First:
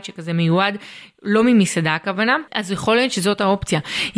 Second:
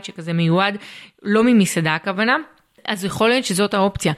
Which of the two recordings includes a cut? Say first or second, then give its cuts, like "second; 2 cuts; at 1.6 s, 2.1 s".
first; 1 cut; at 2.5 s